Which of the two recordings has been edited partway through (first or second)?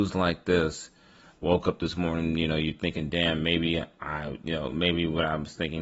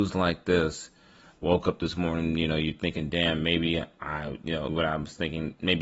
second